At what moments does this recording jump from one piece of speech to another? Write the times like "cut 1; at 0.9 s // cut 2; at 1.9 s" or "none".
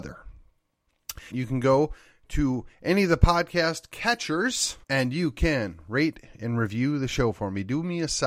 cut 1; at 1.3 s // cut 2; at 4.8 s

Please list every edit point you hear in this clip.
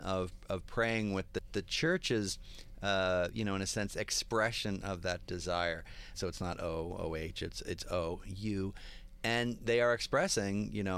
cut 1; at 6.1 s

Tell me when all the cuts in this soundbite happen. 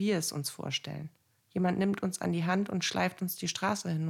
none

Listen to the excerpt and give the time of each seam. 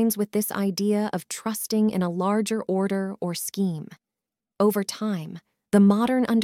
cut 1; at 4.4 s

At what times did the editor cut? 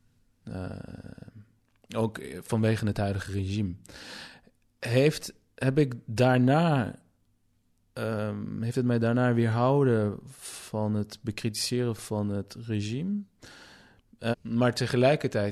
cut 1; at 14.3 s

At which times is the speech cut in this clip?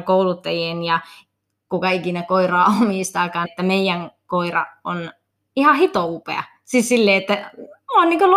cut 1; at 3.5 s

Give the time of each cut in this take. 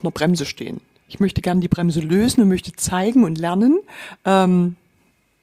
none

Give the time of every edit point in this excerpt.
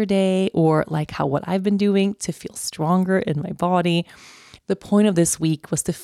cut 1; at 4.6 s

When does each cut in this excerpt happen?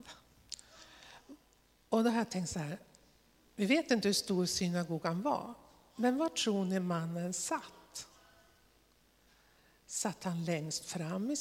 none

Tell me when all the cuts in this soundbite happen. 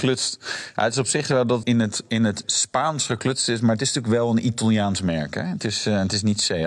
cut 1; at 1.6 s

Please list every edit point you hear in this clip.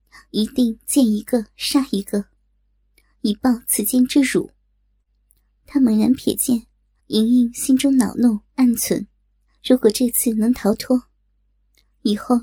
cut 1; at 7.0 s // cut 2; at 8.5 s

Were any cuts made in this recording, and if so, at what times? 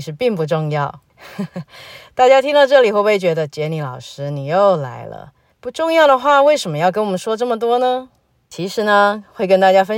none

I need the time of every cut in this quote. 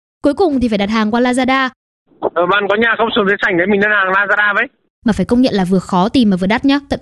none

